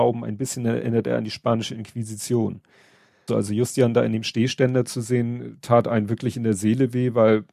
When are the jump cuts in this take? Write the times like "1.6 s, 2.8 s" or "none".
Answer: 3.3 s